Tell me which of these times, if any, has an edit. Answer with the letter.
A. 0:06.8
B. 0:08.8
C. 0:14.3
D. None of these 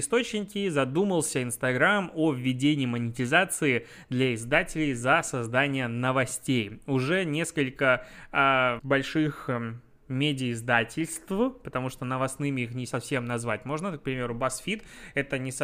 B